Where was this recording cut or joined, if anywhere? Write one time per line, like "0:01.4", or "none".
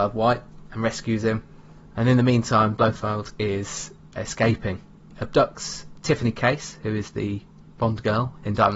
none